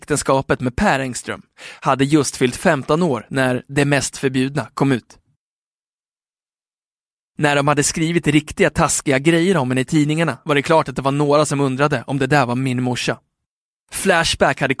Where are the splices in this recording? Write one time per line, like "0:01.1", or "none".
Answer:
0:13.8